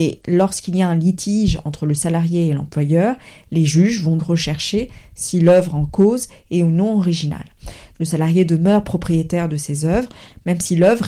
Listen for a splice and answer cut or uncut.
cut